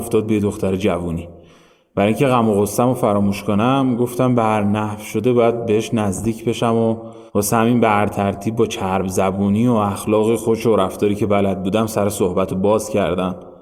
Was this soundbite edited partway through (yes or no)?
yes